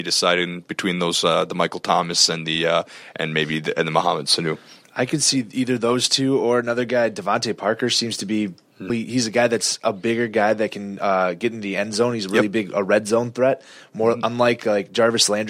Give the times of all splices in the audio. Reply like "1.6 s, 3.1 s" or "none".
8.9 s